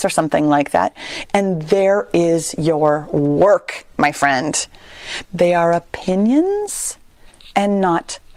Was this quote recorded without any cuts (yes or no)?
no